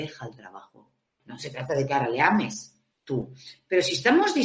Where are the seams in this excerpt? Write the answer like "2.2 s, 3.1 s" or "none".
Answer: 1.2 s